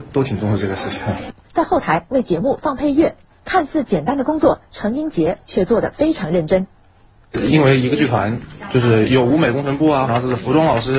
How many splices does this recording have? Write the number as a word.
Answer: two